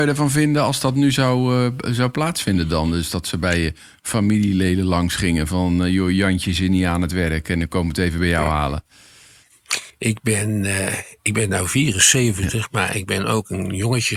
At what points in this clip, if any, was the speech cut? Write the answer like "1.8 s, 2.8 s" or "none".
none